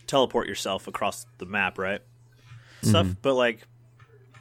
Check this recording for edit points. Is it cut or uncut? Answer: cut